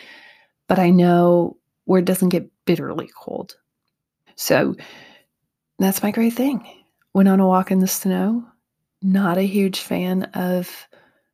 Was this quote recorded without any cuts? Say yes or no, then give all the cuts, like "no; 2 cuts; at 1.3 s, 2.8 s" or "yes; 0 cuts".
no; 1 cut; at 4.3 s